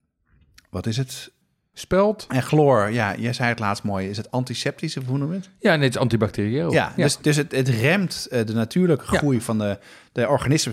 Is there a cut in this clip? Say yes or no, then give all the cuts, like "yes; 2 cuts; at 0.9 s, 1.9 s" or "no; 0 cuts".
yes; 1 cut; at 2.3 s